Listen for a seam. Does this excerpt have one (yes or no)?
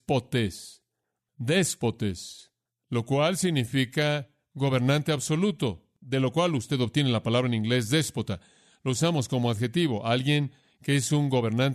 no